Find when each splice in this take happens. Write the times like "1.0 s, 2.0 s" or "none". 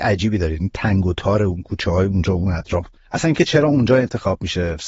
none

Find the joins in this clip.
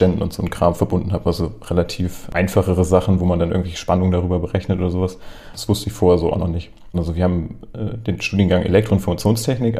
5.5 s, 6.9 s

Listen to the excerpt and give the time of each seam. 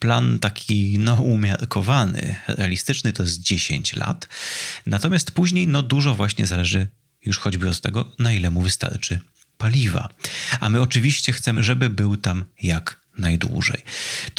11.5 s

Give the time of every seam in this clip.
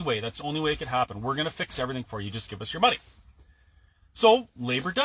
none

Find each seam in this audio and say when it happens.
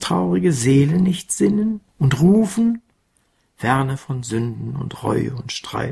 1.9 s

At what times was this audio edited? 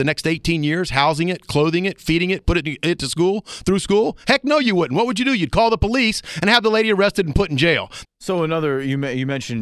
8.0 s

